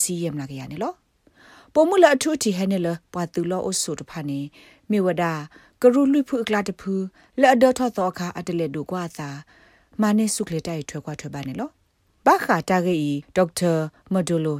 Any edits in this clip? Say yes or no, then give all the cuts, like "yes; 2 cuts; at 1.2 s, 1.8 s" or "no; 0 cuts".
no; 0 cuts